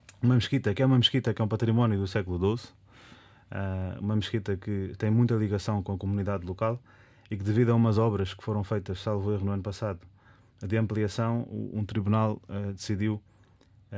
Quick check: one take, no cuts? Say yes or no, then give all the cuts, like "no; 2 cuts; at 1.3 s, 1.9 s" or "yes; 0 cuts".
yes; 0 cuts